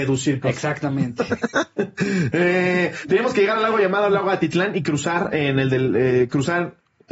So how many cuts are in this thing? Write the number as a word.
zero